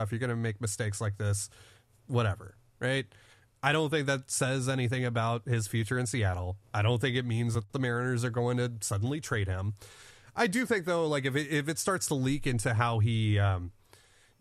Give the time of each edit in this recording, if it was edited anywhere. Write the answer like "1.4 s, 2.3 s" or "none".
none